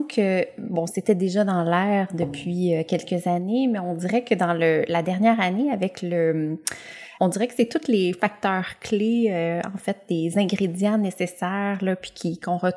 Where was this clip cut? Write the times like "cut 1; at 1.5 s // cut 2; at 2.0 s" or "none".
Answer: cut 1; at 7.2 s